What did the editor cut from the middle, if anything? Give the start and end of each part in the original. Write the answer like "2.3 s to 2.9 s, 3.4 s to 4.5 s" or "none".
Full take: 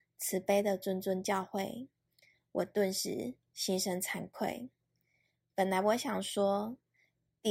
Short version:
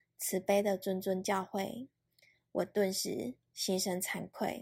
none